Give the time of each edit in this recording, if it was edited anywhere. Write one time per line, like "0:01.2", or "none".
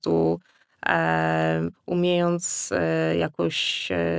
0:01.7